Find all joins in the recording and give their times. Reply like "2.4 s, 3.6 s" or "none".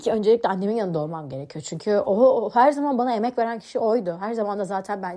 none